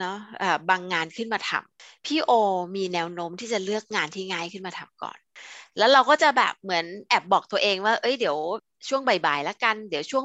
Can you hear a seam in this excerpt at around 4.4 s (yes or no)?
no